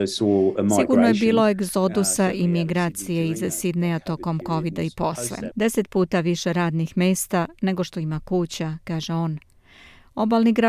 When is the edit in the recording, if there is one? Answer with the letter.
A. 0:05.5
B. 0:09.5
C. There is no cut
A